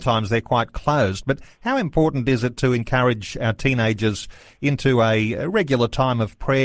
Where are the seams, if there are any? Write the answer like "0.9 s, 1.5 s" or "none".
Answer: none